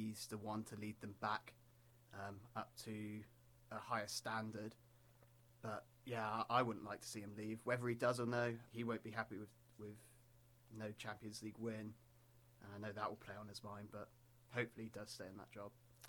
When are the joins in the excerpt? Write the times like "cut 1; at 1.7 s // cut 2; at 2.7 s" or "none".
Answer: cut 1; at 8.7 s